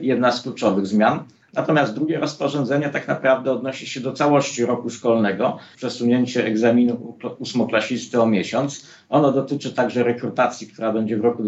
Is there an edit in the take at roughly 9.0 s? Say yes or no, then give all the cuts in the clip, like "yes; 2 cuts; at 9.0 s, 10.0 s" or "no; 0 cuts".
no; 1 cut; at 5.7 s